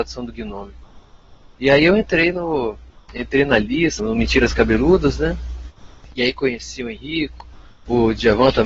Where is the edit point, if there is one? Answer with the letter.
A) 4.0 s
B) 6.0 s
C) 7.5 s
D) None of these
A